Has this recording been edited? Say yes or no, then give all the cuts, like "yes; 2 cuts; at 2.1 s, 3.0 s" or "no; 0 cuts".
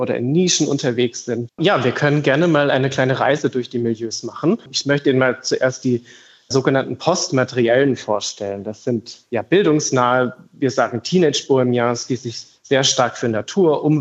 yes; 1 cut; at 1.5 s